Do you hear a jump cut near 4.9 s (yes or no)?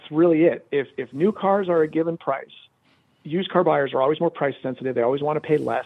no